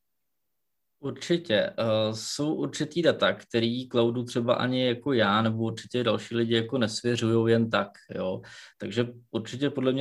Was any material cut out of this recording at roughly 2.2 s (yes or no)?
no